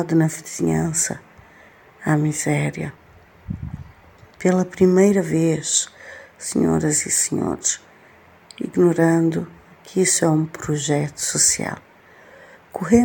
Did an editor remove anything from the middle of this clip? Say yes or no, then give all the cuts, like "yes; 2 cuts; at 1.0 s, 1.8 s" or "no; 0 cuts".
no; 0 cuts